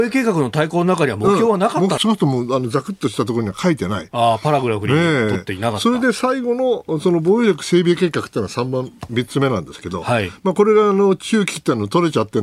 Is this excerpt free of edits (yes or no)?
no